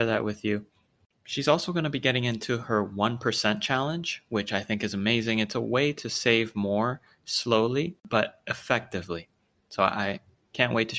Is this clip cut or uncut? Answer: uncut